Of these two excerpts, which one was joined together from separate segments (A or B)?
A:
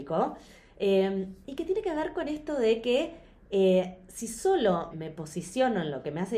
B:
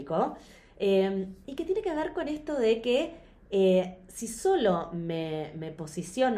A